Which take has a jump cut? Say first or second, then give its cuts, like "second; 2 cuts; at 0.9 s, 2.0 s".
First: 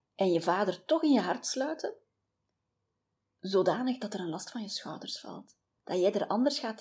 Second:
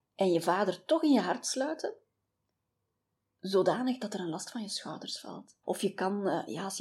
second; 1 cut; at 5.6 s